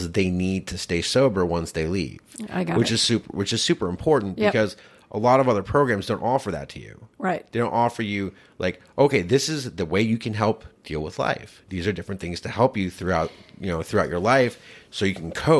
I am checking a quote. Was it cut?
no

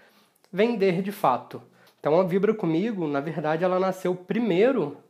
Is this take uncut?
no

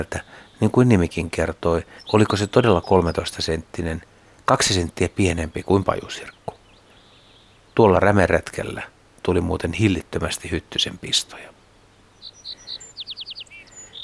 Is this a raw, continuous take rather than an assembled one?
no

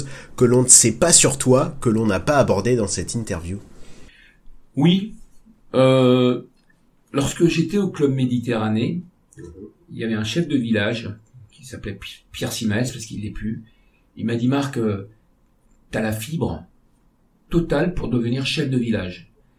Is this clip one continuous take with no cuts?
yes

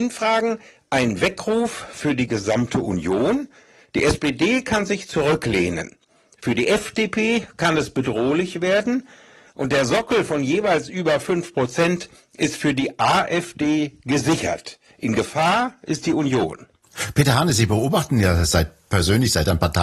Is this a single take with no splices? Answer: yes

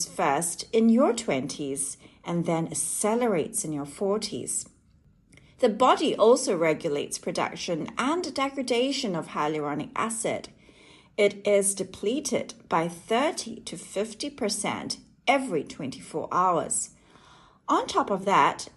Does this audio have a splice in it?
no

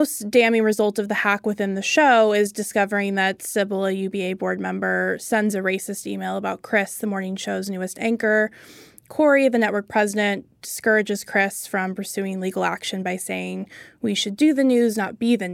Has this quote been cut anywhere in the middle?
no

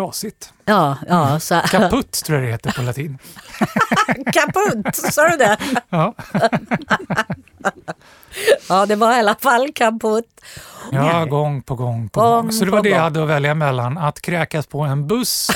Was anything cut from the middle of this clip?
yes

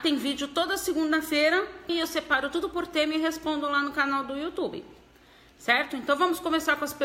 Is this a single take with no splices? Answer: no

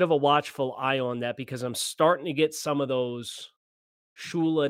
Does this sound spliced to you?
no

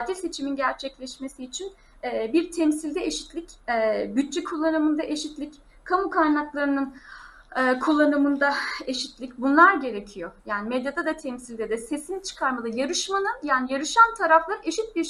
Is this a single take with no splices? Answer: no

